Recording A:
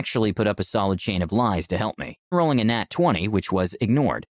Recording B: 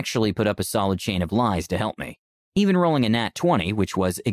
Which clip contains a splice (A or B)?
A